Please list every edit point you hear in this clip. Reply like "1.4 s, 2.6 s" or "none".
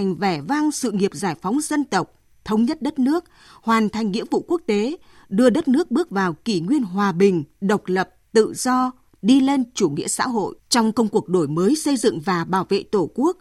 10.6 s